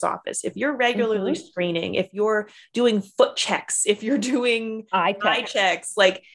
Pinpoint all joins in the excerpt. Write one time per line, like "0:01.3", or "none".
none